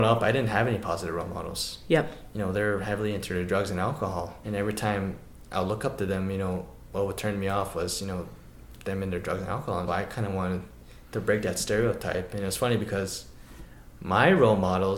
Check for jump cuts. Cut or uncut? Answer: cut